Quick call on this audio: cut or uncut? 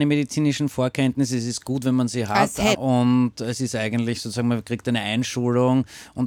cut